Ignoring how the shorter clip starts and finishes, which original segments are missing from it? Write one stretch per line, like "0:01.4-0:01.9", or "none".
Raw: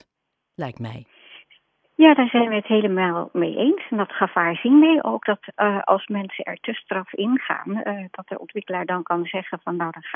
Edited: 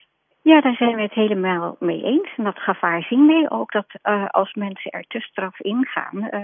none